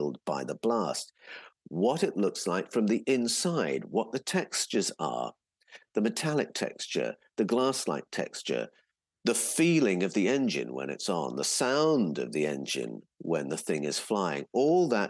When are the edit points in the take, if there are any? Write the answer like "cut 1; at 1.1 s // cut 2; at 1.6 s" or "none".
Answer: none